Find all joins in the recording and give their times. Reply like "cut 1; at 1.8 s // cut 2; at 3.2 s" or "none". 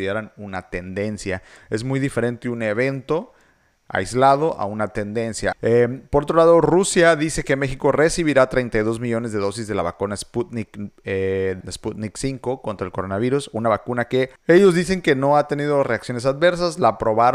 cut 1; at 5.5 s // cut 2; at 11.6 s // cut 3; at 14.4 s